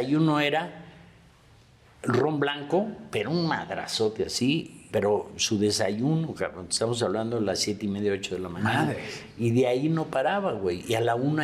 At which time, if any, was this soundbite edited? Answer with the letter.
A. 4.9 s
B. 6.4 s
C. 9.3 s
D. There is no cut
A